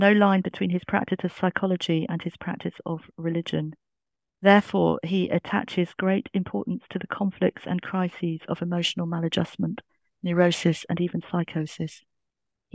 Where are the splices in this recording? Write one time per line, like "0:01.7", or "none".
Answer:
none